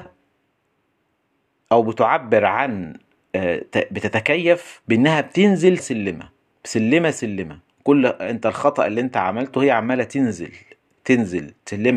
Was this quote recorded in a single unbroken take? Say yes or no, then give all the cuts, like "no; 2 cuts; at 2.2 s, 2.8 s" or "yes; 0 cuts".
no; 2 cuts; at 5.8 s, 10.9 s